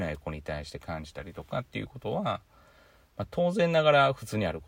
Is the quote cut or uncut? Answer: uncut